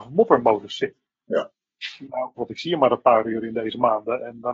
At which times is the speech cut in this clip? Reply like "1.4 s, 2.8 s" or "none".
2.4 s